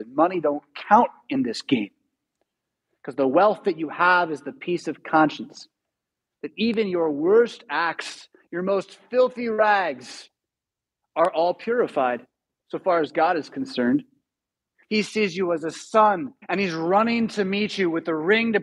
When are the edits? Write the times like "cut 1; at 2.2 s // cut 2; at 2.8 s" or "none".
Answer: cut 1; at 14.8 s // cut 2; at 16.4 s